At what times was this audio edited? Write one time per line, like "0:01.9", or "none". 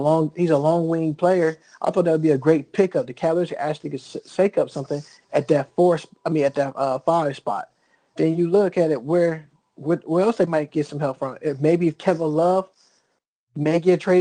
none